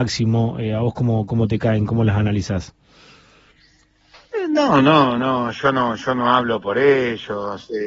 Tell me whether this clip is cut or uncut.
uncut